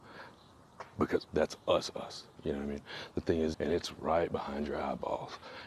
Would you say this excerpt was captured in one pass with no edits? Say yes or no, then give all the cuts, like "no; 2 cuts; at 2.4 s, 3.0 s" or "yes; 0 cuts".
no; 2 cuts; at 1.3 s, 3.5 s